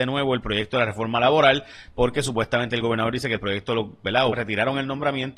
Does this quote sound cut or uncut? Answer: cut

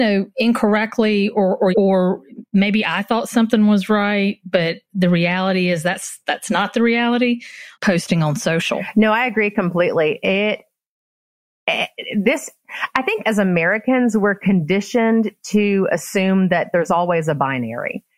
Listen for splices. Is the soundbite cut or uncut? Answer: cut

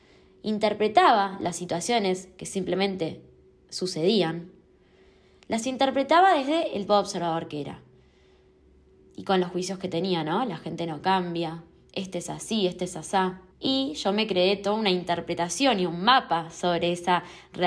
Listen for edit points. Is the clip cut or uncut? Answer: cut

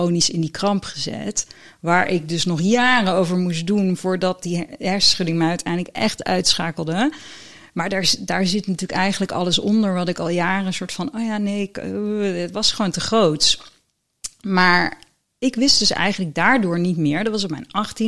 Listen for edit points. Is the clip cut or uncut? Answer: uncut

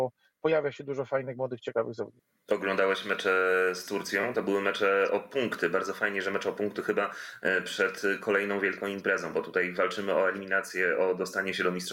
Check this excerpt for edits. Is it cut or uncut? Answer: uncut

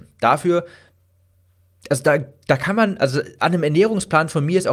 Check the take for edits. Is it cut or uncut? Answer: uncut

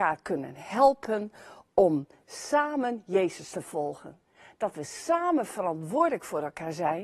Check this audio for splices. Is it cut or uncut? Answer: uncut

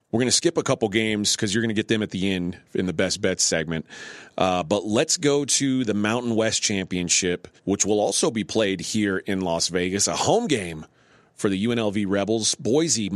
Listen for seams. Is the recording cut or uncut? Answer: cut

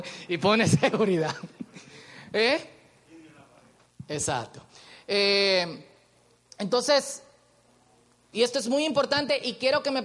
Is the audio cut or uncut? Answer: cut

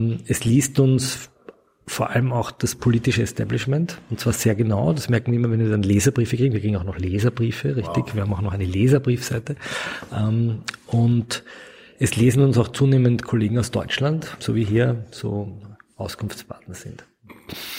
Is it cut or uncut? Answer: cut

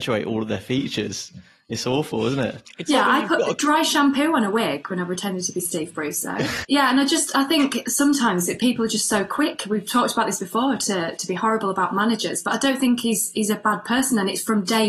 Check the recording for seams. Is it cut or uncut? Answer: cut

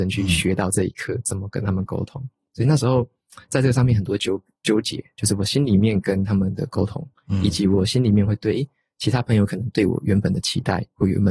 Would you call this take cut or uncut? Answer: uncut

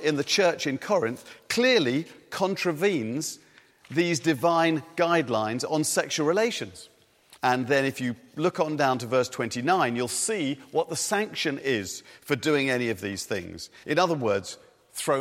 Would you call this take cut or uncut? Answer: cut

